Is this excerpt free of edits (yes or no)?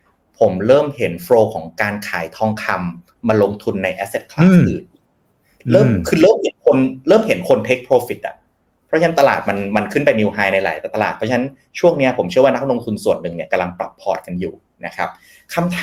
yes